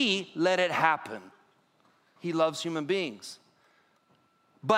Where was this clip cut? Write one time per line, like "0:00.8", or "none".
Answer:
0:02.2